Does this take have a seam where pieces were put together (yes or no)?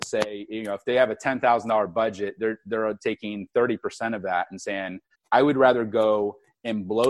yes